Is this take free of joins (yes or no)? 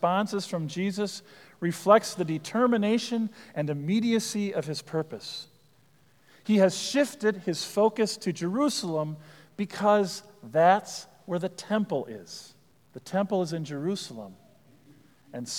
no